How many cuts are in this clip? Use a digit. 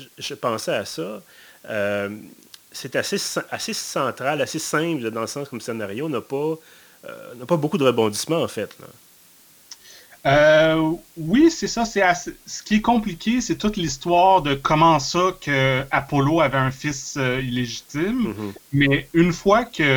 0